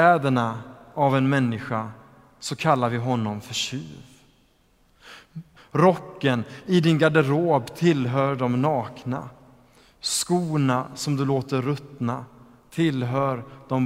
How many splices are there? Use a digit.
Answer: 1